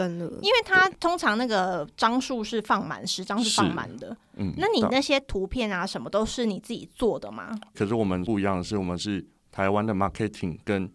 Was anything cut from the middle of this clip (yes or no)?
yes